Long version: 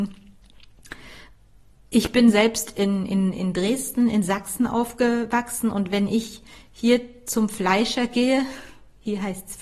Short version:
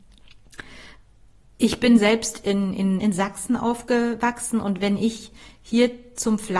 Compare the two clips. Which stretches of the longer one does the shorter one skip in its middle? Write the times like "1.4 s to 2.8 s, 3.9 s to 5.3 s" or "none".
3.3 s to 4.1 s